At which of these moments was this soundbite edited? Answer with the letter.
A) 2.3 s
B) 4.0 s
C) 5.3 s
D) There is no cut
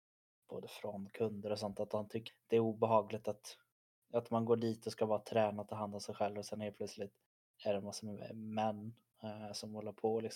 A